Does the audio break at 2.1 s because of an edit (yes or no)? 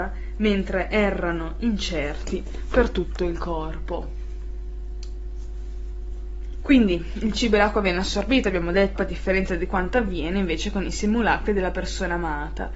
no